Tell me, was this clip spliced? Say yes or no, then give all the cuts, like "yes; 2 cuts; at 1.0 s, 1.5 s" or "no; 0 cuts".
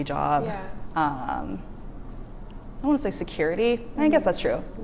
yes; 1 cut; at 2.8 s